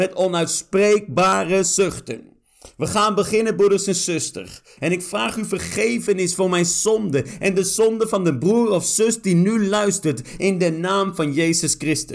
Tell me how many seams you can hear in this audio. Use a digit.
1